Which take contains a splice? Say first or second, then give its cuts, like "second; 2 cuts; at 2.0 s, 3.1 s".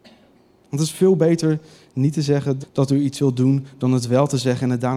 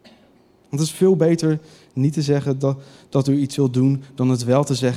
first; 1 cut; at 2.6 s